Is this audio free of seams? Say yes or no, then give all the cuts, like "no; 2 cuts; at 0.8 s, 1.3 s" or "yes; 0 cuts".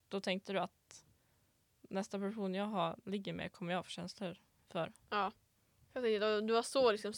no; 1 cut; at 5.8 s